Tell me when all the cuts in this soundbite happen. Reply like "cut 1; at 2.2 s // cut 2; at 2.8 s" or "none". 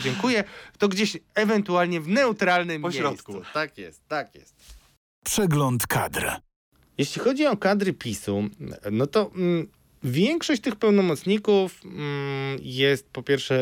none